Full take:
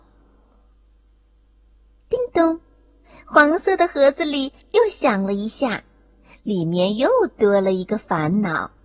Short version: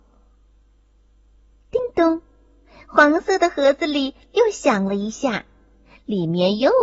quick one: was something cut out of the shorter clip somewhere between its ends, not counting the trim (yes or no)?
no